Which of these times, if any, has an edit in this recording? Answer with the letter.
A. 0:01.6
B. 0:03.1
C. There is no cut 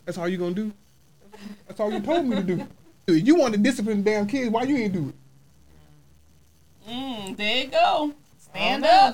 B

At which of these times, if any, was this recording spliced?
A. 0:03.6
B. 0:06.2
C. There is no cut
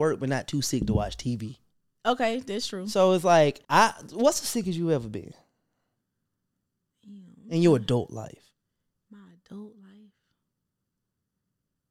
A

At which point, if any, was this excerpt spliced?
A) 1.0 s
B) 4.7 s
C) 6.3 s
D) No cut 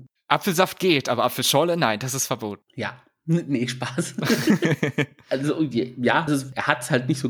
C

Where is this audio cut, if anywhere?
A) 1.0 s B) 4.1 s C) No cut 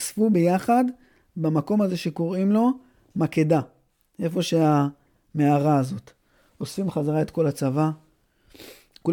C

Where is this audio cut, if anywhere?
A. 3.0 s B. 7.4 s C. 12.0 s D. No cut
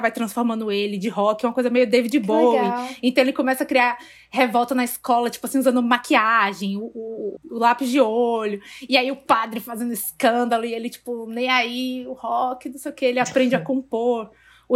B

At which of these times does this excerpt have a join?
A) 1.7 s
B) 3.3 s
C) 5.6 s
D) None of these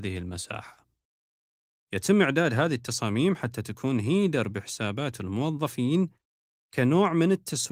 A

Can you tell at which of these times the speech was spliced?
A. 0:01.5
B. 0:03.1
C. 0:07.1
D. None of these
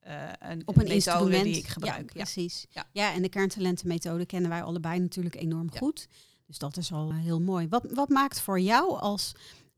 C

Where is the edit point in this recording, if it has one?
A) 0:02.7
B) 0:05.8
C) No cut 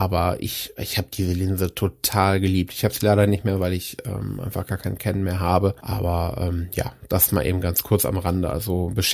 C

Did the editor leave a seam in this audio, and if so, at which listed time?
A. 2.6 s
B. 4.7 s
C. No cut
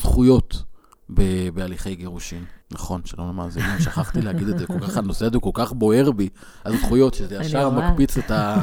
A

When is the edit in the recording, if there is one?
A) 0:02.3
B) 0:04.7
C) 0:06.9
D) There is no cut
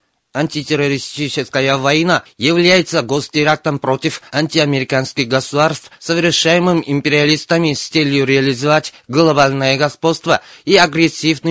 A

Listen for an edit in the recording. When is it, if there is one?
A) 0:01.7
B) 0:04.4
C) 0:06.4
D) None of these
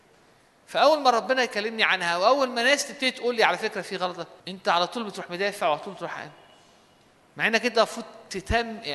B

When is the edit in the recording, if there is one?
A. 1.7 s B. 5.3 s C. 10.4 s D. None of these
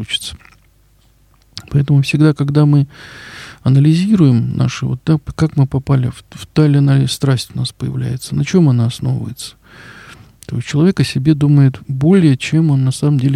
C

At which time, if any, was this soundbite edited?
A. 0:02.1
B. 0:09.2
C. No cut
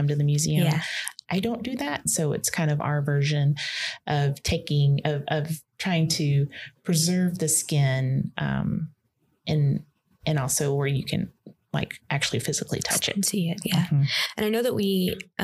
A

